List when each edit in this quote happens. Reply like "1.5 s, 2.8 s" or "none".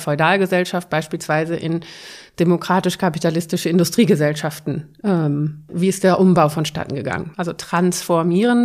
5.7 s, 7.3 s